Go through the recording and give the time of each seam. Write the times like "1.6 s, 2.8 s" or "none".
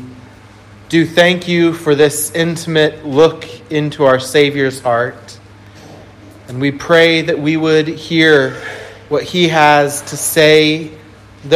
none